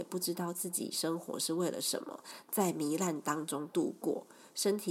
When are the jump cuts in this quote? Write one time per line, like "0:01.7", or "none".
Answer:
0:02.4